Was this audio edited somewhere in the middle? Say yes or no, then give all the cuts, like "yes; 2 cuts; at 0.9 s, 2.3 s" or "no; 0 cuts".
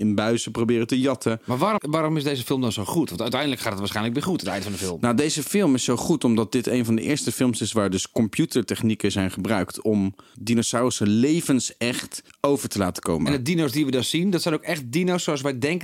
yes; 1 cut; at 1.8 s